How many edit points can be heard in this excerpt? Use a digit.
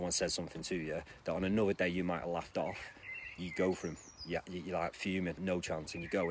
2